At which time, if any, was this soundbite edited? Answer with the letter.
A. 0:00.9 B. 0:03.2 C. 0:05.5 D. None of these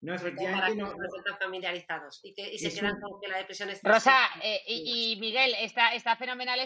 D